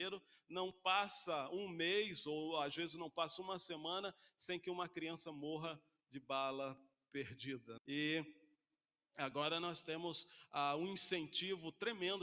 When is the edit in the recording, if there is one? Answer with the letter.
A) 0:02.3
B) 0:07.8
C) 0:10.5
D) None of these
B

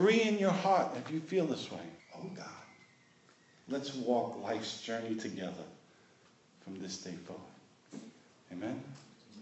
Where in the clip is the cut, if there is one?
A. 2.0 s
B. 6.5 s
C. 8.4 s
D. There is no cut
A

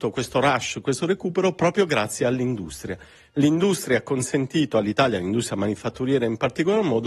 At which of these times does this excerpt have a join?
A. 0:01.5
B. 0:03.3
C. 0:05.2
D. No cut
D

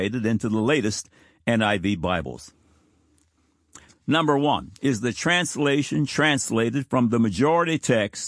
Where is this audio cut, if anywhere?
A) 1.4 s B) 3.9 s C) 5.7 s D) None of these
B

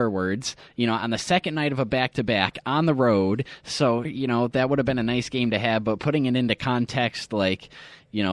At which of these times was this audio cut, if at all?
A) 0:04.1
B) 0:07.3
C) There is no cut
A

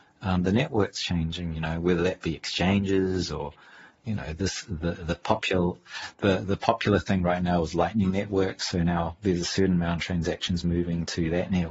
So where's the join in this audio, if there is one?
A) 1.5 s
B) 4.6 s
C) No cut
A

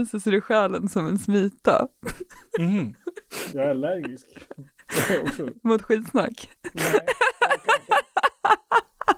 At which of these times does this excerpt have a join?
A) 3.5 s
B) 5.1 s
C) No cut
A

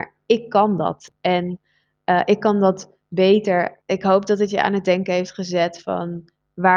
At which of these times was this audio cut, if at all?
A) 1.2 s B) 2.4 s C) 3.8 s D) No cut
C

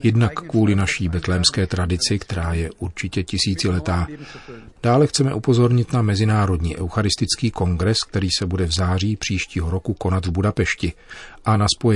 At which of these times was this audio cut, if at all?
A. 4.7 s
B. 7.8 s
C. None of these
A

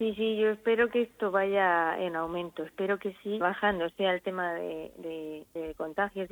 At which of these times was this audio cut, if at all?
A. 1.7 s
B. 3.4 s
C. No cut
B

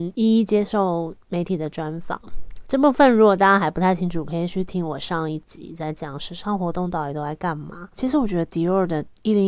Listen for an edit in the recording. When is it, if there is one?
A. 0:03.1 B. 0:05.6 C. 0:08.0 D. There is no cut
C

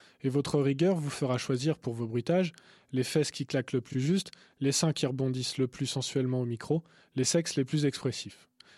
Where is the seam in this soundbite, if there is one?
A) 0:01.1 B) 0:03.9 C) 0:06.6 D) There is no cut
D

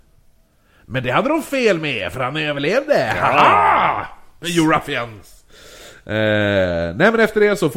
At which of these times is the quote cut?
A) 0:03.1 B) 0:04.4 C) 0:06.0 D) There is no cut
B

